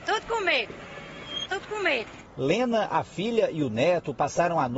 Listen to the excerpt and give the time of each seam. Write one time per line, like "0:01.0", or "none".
0:01.5